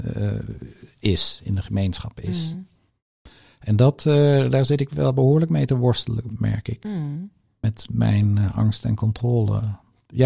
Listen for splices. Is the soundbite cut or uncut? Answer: uncut